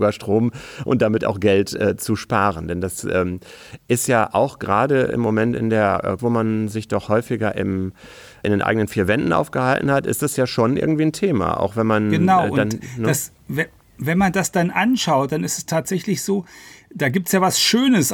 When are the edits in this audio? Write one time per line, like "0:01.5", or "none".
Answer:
0:06.2